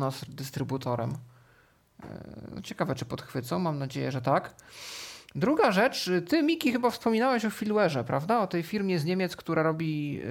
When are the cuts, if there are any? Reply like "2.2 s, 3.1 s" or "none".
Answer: none